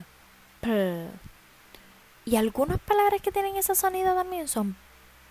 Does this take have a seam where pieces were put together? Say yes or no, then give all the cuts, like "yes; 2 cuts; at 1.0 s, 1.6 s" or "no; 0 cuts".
no; 0 cuts